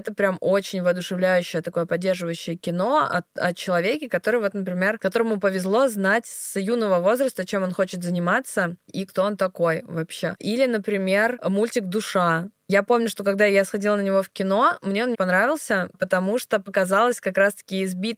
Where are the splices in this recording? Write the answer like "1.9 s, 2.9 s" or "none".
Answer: 10.4 s, 15.1 s